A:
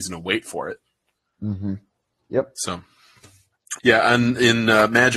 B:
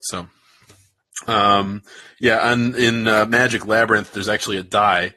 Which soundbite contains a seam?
A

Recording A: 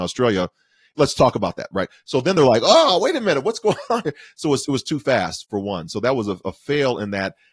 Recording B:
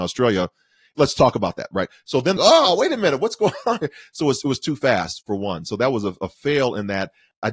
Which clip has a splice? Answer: B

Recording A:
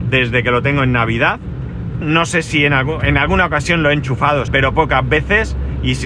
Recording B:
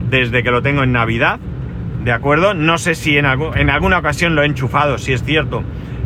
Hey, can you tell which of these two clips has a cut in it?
A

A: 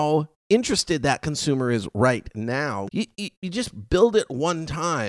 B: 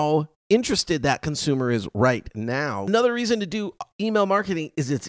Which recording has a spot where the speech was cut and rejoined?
A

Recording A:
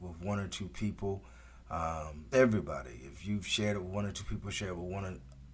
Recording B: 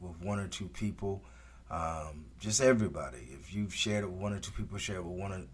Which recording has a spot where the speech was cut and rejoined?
A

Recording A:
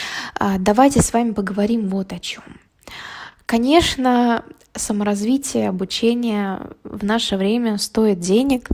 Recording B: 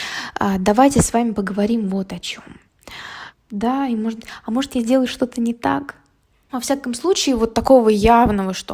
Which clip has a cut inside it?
B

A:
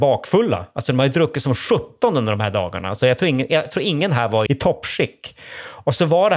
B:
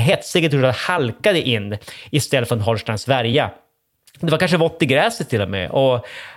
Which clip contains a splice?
A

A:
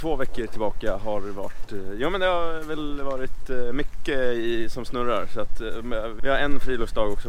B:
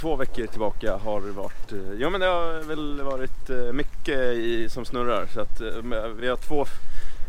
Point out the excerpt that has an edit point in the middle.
A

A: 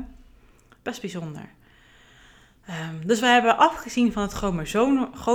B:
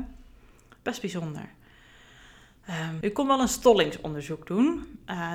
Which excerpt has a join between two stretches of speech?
B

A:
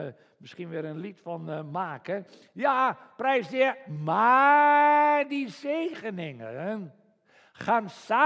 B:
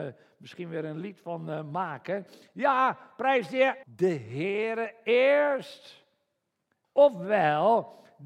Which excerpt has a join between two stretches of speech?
B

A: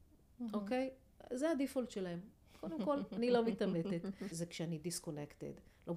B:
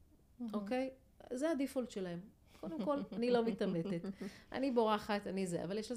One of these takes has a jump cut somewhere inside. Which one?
A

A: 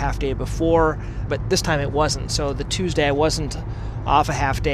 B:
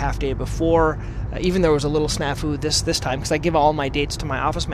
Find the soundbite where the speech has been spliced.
A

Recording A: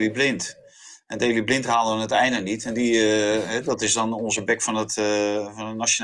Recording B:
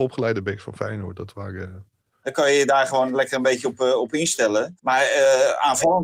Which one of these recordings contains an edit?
B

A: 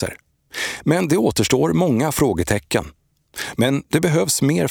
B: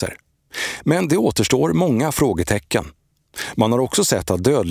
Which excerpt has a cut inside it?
A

